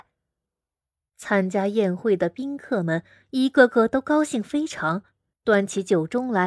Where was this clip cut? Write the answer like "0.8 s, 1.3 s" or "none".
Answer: 5.3 s